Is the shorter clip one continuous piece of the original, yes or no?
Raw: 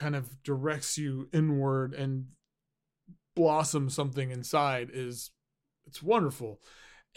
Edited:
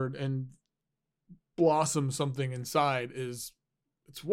yes